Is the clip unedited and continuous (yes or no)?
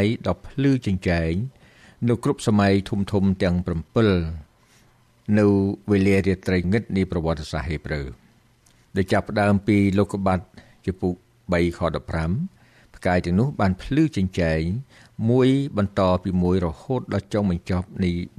no